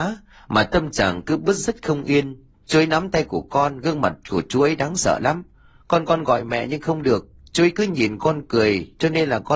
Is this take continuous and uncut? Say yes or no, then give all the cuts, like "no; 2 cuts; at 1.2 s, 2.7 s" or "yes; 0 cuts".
no; 1 cut; at 2.6 s